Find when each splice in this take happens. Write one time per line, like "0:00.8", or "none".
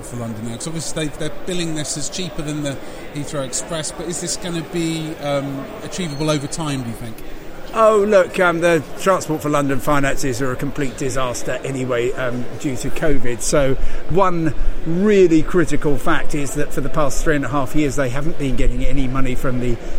none